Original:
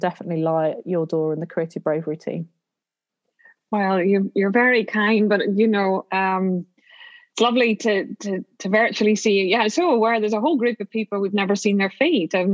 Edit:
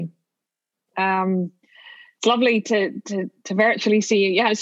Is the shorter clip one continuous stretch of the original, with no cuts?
no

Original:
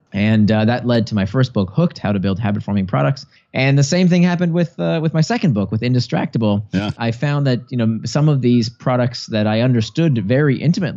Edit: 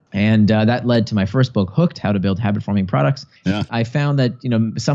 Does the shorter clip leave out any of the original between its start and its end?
yes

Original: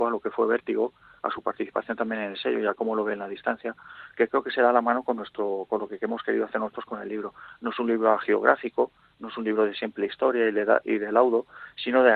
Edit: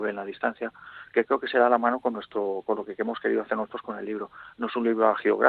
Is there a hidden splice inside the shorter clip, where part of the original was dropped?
no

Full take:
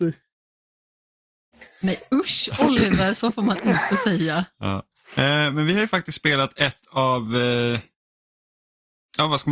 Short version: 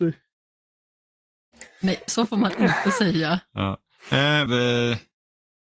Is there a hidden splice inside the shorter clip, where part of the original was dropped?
yes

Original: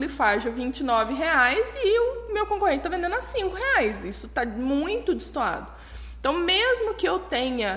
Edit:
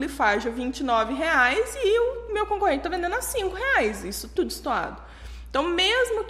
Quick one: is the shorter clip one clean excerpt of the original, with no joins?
no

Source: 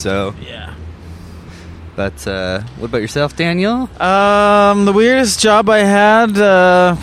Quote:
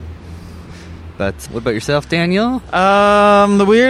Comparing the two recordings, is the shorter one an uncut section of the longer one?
no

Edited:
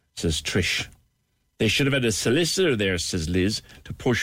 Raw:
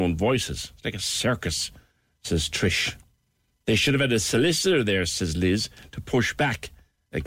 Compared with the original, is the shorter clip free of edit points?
yes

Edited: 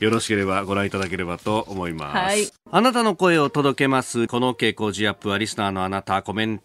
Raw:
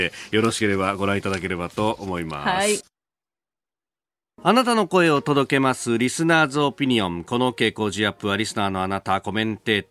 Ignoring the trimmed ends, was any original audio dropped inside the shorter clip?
yes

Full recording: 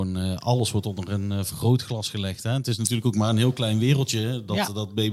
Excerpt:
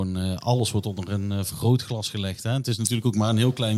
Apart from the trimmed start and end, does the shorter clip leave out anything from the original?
no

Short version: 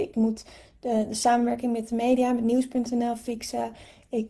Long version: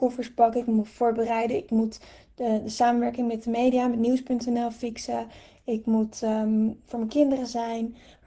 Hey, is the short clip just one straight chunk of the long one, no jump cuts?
yes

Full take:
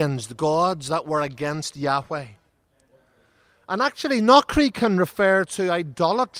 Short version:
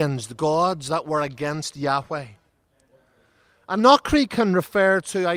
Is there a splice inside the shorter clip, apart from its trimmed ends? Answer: yes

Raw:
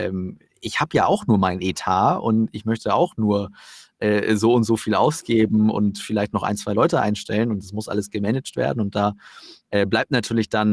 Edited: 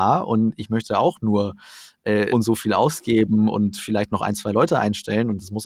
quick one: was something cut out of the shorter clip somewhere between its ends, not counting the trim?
yes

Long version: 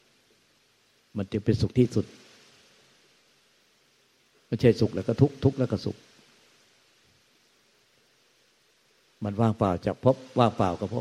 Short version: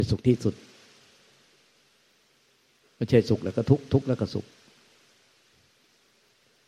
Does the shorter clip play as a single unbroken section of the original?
yes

